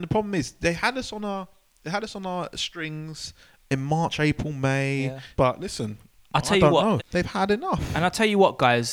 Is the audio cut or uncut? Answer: cut